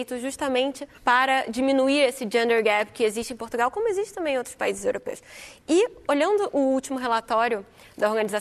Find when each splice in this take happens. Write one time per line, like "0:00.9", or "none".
0:01.0